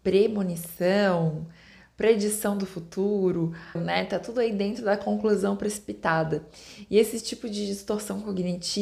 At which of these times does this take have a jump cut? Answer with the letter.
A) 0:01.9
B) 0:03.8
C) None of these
B